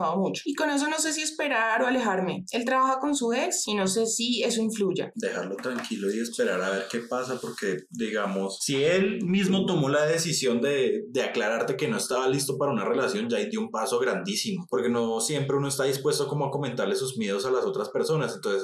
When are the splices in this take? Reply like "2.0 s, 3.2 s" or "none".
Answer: 5.1 s